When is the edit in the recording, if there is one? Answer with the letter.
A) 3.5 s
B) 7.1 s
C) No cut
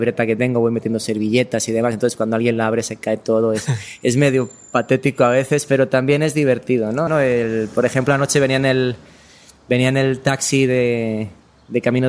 B